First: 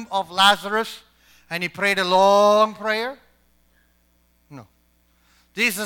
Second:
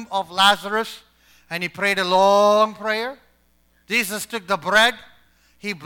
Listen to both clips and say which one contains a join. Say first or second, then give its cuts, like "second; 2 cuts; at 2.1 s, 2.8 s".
second; 1 cut; at 3.8 s